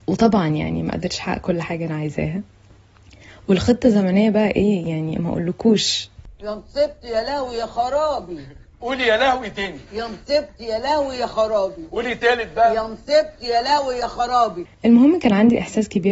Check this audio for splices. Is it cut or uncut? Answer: cut